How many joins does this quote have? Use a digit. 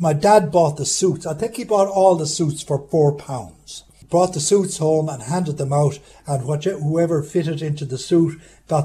0